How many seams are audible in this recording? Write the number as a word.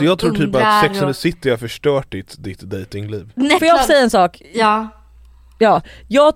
one